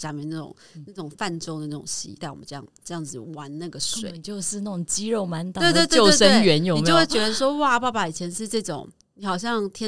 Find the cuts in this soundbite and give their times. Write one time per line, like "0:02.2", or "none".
0:02.2